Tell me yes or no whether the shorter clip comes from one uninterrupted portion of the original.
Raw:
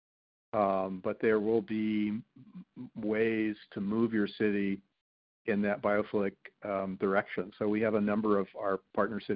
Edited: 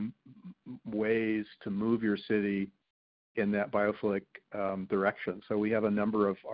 yes